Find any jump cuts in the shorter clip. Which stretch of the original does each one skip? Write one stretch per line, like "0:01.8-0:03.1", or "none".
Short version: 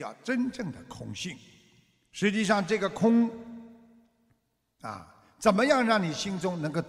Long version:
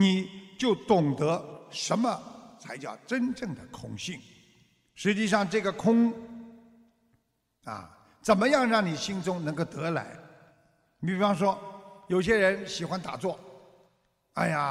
none